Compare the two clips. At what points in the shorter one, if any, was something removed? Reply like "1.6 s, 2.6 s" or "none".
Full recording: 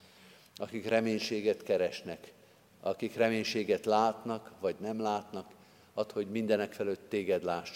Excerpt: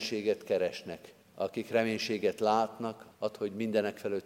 1.2 s, 3.1 s